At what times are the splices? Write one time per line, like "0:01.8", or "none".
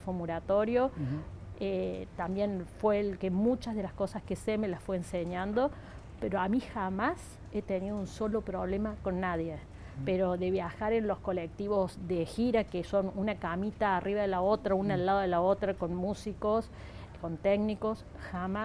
0:01.5